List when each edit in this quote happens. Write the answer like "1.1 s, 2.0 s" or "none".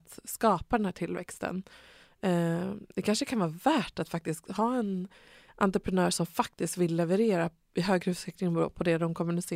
none